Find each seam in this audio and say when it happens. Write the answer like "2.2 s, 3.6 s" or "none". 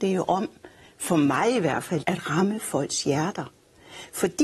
2.0 s